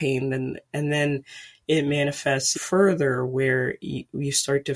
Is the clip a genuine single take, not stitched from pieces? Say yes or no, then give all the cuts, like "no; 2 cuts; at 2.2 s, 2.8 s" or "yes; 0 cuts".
no; 1 cut; at 2.5 s